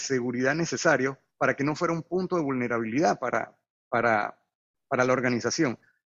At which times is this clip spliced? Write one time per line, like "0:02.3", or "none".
none